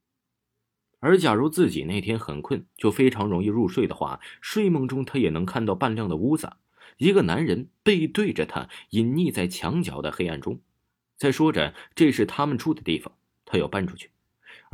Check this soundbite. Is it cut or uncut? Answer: uncut